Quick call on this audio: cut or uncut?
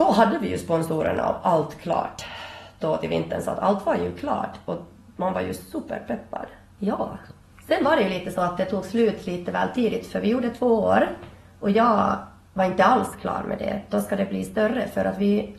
cut